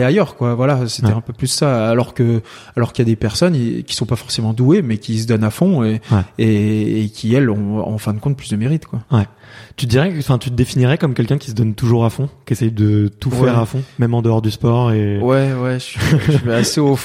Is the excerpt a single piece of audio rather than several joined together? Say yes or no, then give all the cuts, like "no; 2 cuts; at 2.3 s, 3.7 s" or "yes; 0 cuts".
yes; 0 cuts